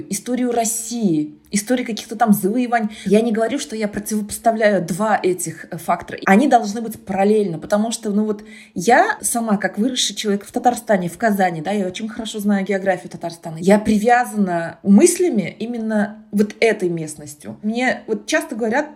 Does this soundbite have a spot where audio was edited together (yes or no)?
no